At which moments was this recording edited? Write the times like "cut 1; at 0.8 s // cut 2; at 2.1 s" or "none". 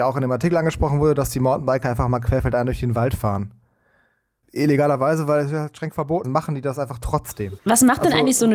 cut 1; at 4.4 s // cut 2; at 6.2 s // cut 3; at 7.6 s